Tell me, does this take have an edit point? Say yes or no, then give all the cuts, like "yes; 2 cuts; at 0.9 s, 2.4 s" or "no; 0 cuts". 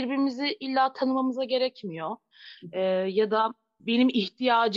no; 0 cuts